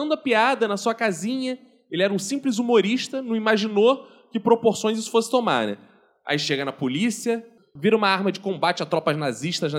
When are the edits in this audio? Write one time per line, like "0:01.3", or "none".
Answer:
0:07.6